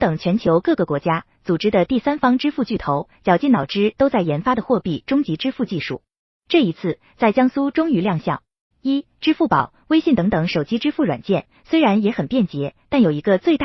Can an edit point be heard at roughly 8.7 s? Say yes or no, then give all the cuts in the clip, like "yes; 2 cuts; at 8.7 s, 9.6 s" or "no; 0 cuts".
yes; 1 cut; at 8.7 s